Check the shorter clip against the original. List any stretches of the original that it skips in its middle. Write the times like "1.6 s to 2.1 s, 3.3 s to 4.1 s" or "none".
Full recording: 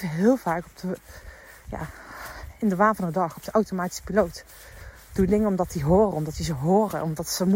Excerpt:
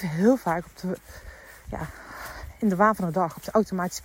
none